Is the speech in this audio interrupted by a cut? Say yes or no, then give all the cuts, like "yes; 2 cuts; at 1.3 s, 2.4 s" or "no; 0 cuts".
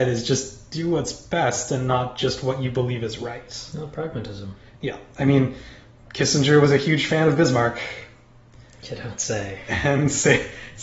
no; 0 cuts